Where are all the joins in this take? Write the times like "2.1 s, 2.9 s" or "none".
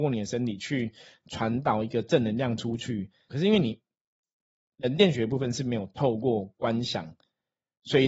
3.3 s